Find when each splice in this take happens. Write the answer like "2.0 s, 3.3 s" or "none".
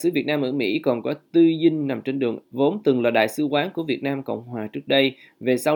2.4 s